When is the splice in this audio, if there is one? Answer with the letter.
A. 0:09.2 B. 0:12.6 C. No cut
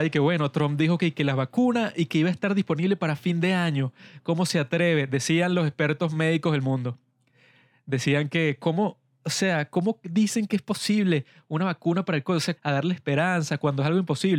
B